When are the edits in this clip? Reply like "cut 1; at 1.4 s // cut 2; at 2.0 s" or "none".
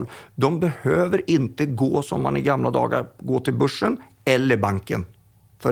none